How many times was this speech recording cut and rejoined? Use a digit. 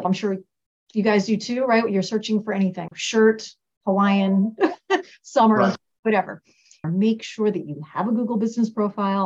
2